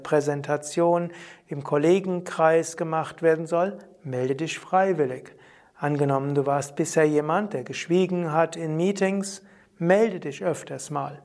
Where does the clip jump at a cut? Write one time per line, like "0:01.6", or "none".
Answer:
none